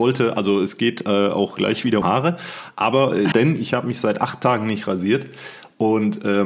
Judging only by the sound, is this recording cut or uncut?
cut